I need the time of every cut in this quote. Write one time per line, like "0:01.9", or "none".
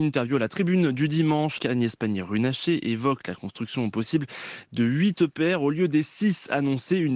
0:01.6